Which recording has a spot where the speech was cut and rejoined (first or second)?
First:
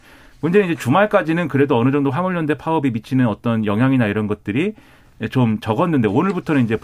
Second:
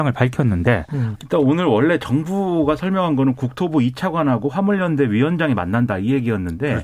second